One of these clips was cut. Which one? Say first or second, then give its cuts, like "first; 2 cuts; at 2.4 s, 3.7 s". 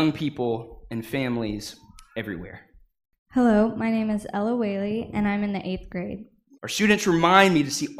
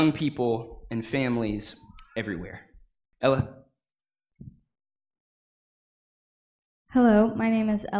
first; 2 cuts; at 3.2 s, 6.5 s